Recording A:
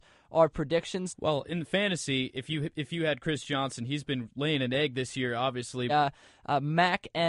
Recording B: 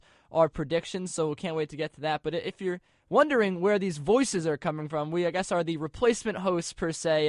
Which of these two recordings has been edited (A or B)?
A